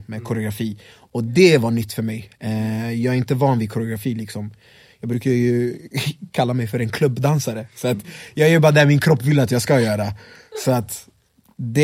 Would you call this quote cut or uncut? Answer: uncut